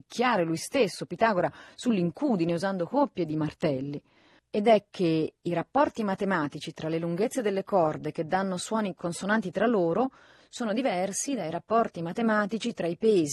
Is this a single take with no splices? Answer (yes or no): no